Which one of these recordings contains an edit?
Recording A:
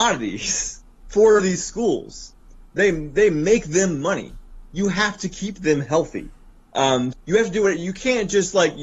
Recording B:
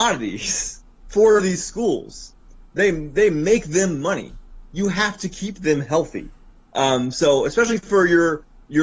A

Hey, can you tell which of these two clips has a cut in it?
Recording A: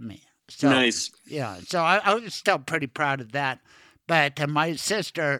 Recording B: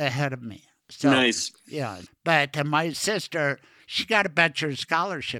B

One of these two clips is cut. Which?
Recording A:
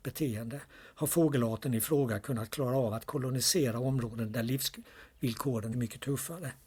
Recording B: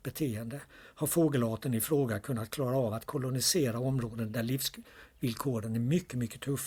A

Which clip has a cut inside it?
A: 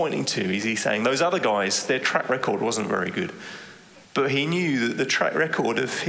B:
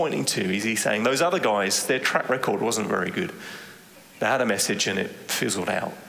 A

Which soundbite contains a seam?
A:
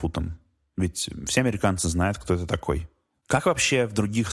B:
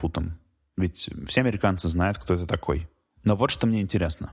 A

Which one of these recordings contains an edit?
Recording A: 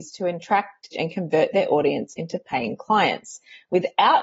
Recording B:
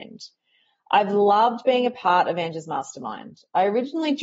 A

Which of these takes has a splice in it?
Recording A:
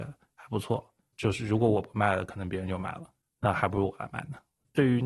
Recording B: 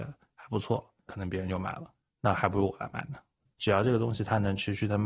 B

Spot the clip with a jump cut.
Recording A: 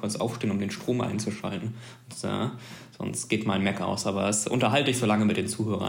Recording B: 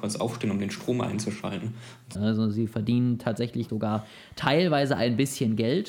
B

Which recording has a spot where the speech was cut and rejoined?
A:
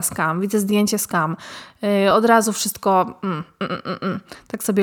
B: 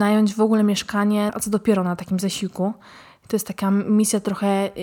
B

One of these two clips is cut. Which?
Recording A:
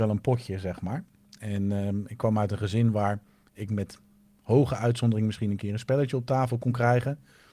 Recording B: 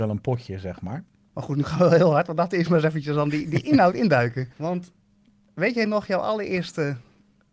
B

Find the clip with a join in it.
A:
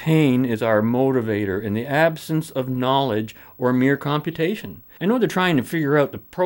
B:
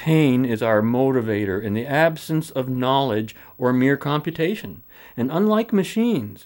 A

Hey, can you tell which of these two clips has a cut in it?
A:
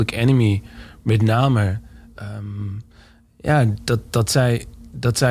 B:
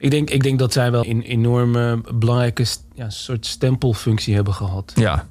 B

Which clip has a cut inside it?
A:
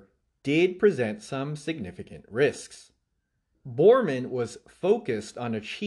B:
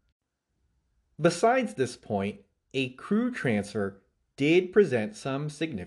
A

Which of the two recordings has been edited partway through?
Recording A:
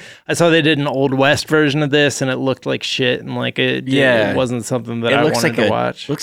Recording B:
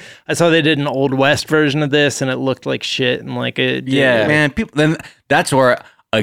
B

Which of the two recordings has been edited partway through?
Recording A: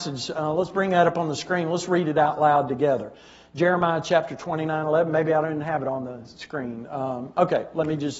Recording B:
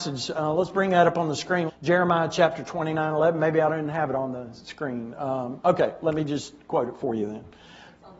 B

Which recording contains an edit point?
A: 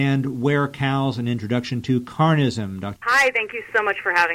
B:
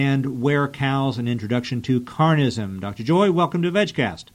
A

